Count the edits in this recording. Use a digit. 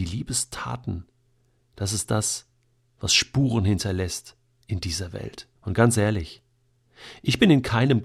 1